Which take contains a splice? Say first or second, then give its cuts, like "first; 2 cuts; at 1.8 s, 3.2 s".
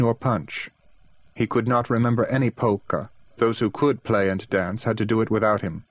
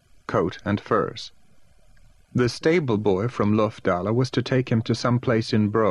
first; 1 cut; at 3.3 s